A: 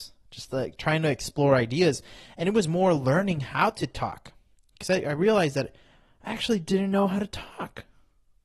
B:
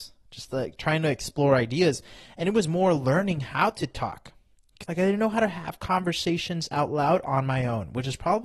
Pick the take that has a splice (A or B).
B